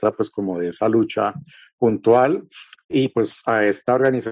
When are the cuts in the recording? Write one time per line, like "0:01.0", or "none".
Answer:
0:02.8